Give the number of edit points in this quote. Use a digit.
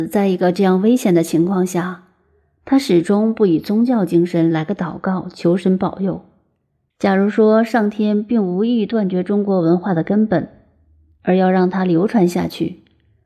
1